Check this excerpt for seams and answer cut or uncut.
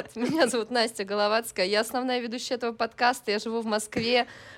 uncut